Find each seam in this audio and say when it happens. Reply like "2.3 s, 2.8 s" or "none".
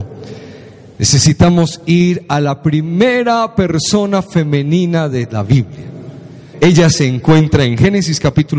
6.5 s